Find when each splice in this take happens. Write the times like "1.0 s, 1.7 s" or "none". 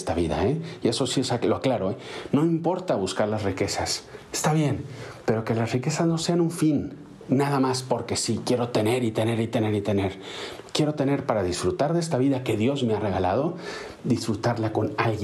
none